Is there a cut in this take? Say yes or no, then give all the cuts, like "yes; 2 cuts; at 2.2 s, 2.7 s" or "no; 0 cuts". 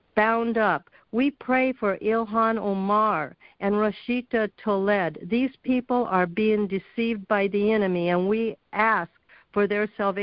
no; 0 cuts